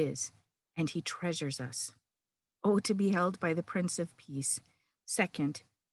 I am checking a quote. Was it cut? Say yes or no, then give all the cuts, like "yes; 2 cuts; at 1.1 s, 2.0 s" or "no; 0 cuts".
yes; 2 cuts; at 2.6 s, 4.9 s